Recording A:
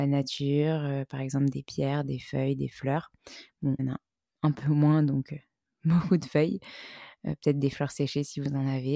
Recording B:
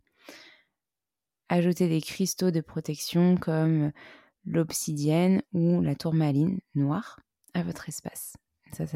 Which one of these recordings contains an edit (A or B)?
A